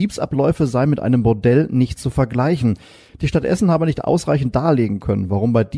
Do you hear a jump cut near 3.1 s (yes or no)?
yes